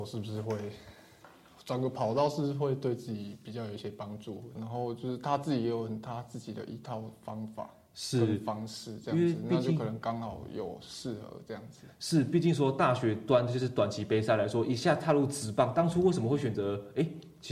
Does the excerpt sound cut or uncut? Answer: cut